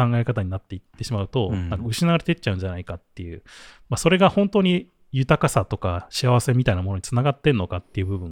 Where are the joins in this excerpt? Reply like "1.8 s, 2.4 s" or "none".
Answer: none

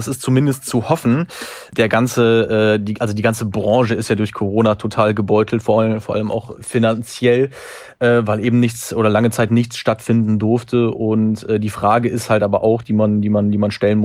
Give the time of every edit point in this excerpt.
6.5 s

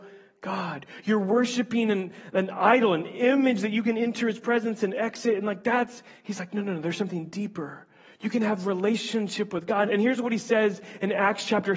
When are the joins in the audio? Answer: 9.9 s

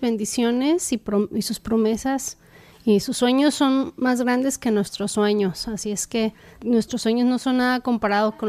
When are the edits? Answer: 6.5 s

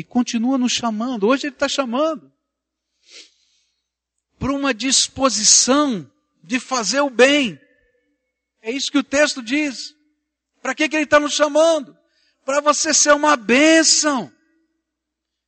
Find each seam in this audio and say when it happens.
none

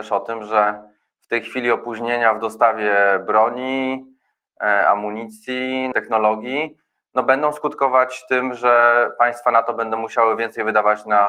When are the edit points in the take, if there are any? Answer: 5.9 s

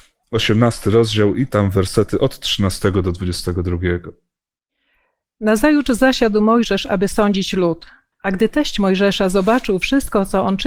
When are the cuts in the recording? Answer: 8.1 s

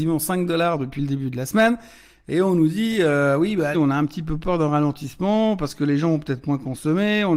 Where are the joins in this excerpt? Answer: 3.7 s

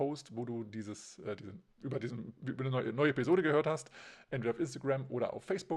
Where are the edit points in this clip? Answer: 1.7 s

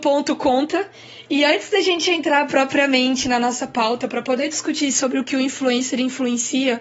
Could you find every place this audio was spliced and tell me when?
none

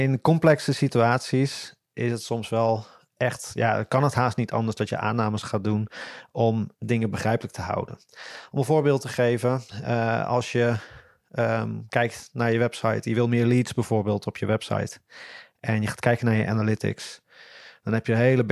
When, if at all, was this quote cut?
none

